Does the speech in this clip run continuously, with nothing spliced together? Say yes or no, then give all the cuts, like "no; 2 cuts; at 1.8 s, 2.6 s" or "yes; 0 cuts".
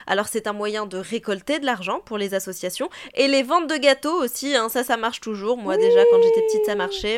yes; 0 cuts